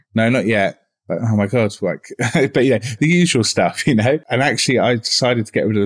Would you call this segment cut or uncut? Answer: uncut